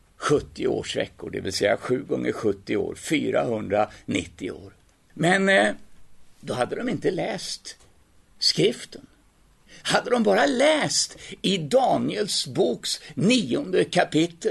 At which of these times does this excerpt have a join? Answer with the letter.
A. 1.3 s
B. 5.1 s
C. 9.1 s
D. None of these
B